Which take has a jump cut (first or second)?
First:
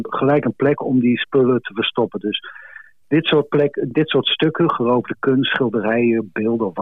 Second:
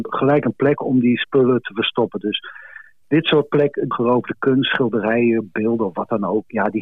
second